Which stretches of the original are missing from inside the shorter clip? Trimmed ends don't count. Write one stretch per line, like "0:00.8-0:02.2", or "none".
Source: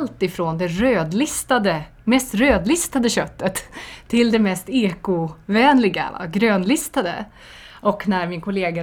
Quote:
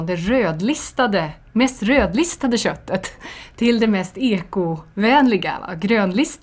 none